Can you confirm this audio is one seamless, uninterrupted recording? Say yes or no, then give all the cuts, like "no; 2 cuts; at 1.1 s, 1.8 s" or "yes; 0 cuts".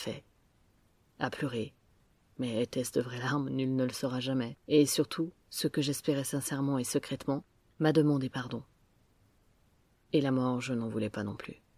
no; 2 cuts; at 4.6 s, 9.9 s